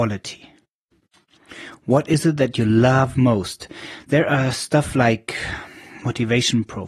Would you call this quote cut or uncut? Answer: uncut